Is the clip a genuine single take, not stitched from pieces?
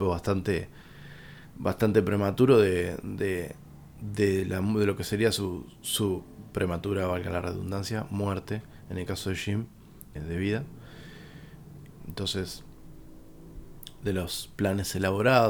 no; 2 cuts; at 10.2 s, 12.0 s

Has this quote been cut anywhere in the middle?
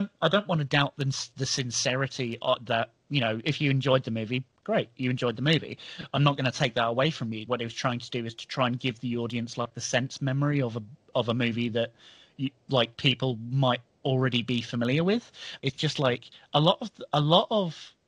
yes; 3 cuts; at 7.5 s, 12.9 s, 15.6 s

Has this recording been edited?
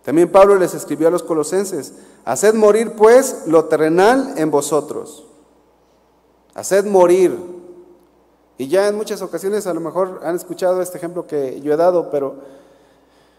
no; 0 cuts

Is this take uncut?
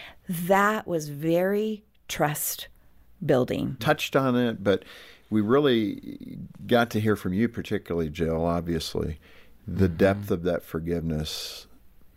no; 1 cut; at 3.8 s

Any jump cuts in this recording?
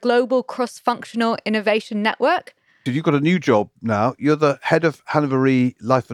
yes; 1 cut; at 2.9 s

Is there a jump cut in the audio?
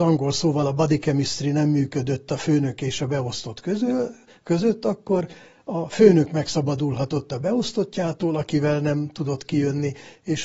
no; 0 cuts

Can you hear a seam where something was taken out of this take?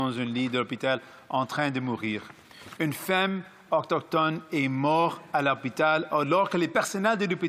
no; 0 cuts

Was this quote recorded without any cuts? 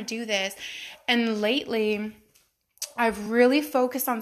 yes; 0 cuts

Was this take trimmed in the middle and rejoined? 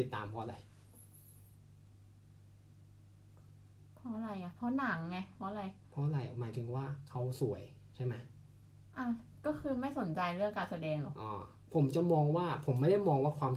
yes; 1 cut; at 11.1 s

